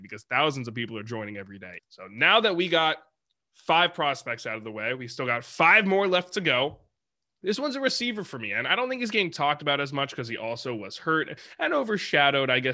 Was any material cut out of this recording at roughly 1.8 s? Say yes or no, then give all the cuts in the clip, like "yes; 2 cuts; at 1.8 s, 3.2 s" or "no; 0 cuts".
yes; 1 cut; at 1.8 s